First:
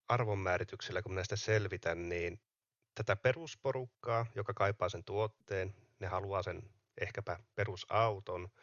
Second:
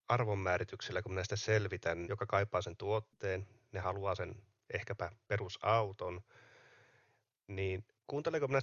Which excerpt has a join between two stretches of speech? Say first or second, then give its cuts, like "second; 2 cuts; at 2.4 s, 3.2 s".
second; 1 cut; at 2.0 s